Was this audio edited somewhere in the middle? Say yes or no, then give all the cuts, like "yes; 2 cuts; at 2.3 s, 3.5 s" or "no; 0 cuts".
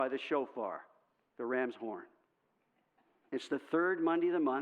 yes; 1 cut; at 3.3 s